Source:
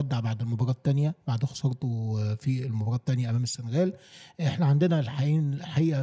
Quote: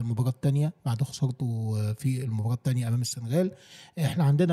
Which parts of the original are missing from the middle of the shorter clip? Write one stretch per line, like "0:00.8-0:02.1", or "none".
none